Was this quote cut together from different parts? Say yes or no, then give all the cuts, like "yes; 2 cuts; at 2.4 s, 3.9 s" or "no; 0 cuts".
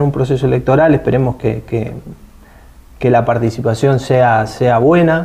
yes; 1 cut; at 3.0 s